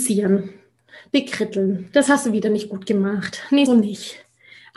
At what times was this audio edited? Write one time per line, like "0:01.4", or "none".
0:03.7